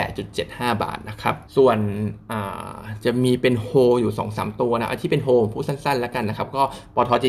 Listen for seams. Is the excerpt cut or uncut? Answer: cut